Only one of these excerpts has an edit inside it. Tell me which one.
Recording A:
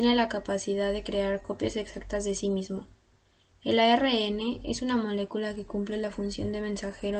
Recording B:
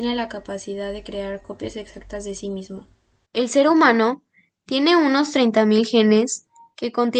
B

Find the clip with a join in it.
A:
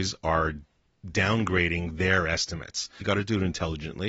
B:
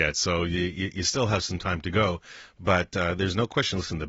A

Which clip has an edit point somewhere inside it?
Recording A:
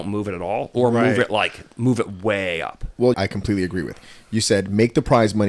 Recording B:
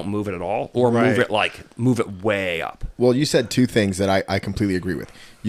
A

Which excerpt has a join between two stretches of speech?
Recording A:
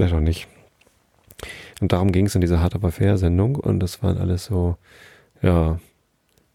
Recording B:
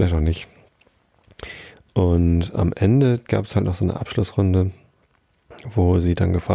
A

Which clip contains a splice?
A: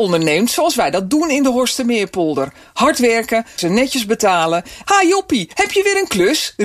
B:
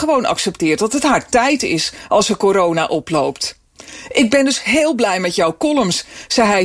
A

